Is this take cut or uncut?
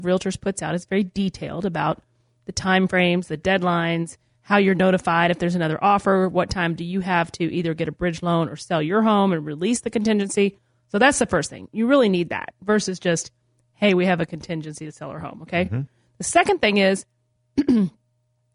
uncut